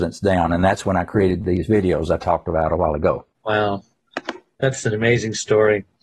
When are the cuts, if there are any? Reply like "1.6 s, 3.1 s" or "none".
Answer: 3.3 s

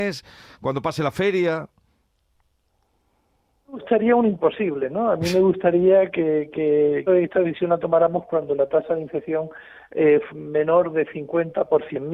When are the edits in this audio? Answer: 7.1 s, 10.3 s

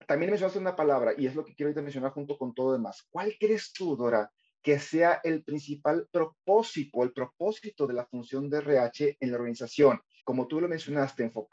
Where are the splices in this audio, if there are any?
6.9 s, 10.2 s

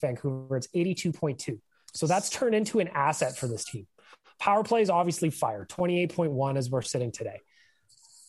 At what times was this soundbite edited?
none

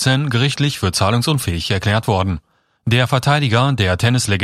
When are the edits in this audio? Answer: 2.8 s

